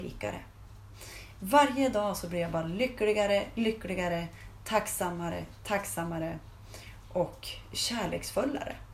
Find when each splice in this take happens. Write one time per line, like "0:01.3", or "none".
none